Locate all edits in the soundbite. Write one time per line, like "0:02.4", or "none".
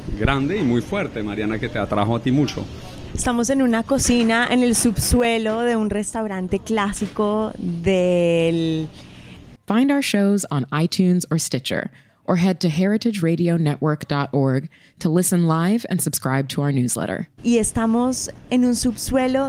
0:03.1
0:09.5
0:17.4